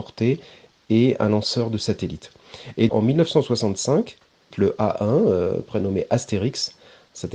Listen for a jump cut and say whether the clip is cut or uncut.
cut